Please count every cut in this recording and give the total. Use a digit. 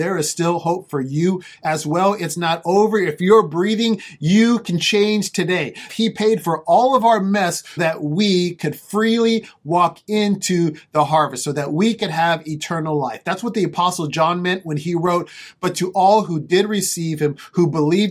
2